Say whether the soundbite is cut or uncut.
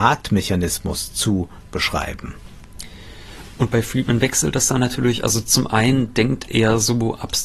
uncut